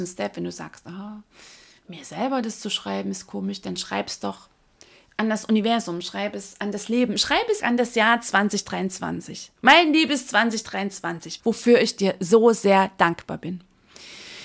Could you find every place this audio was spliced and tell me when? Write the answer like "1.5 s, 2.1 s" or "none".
7.6 s, 11.4 s